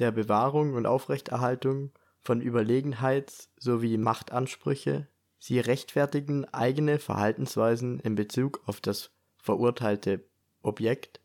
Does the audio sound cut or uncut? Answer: uncut